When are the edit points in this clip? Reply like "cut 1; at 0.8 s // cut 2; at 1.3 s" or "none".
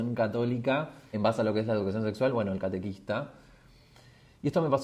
cut 1; at 1.1 s